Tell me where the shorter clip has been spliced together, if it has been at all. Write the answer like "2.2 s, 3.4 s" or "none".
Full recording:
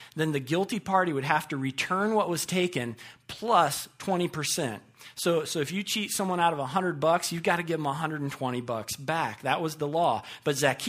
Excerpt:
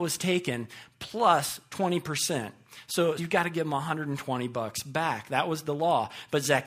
3.2 s